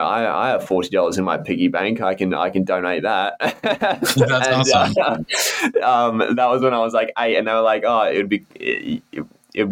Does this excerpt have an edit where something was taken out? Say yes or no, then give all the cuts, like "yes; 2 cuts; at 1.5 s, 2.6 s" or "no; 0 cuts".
no; 0 cuts